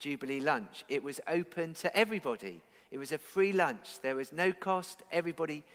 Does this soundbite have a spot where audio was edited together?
no; 0 cuts

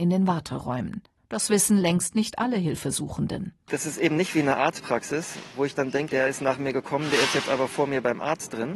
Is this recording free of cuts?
no; 2 cuts; at 1.2 s, 6.1 s

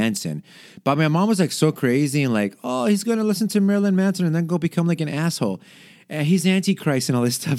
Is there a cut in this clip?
no; 0 cuts

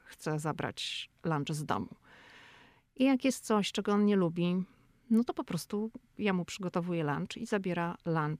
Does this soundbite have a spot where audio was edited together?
no; 0 cuts

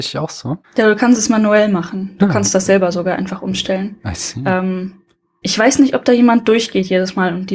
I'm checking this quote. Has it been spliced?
no; 0 cuts

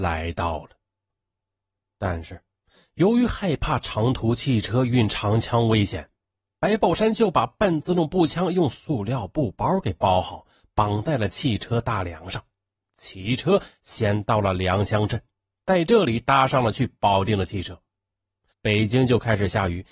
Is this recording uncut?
no; 1 cut; at 18.5 s

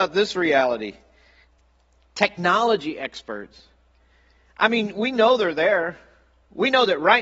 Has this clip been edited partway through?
no; 0 cuts

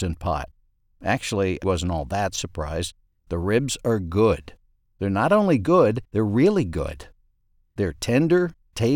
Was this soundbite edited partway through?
yes; 3 cuts; at 1.6 s, 3.1 s, 6.1 s

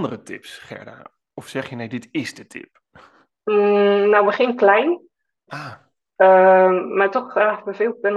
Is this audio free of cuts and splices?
no; 1 cut; at 5.5 s

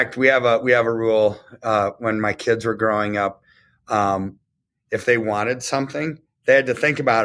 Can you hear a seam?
no; 0 cuts

